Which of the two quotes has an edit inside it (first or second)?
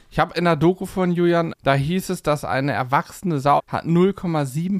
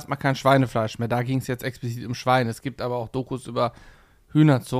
first